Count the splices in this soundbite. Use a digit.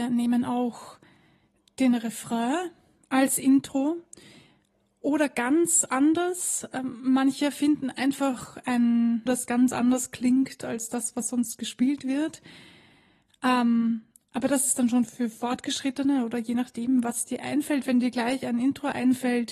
1